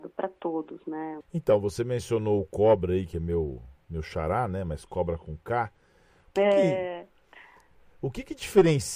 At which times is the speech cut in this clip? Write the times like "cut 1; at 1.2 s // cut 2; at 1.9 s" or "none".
cut 1; at 1.2 s